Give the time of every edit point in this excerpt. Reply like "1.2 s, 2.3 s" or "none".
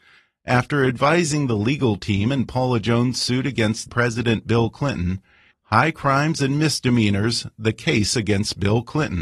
3.9 s, 5.5 s